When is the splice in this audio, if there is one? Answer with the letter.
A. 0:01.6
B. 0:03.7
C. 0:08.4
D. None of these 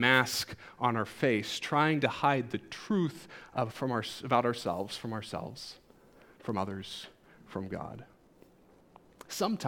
D